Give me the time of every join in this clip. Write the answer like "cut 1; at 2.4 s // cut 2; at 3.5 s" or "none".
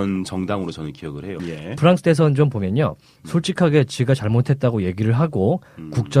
cut 1; at 1.4 s // cut 2; at 3.2 s